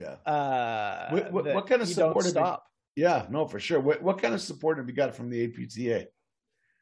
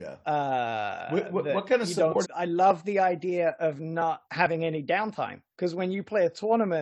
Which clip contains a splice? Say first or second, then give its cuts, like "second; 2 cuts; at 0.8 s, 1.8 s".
second; 3 cuts; at 2.2 s, 4.2 s, 5.5 s